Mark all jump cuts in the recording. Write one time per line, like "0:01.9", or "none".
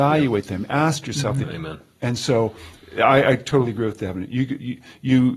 0:01.4